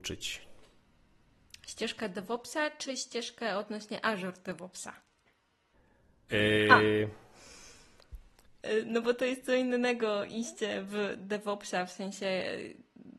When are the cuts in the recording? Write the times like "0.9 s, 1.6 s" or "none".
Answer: 6.3 s, 8.6 s